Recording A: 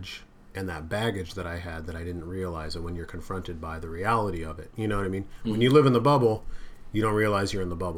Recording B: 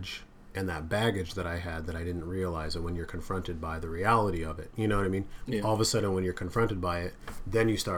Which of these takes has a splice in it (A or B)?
B